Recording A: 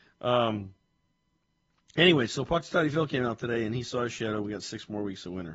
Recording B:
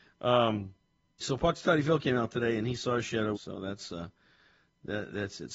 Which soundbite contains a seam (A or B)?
B